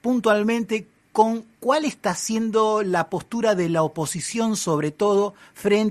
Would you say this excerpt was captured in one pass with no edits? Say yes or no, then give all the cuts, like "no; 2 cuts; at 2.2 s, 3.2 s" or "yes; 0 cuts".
yes; 0 cuts